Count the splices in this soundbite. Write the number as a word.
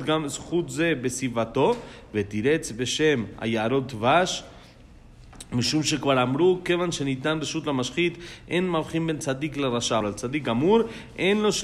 one